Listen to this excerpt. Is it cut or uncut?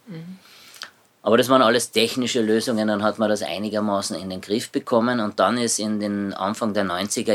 uncut